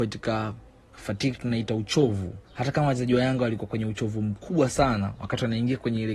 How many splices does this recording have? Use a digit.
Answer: 2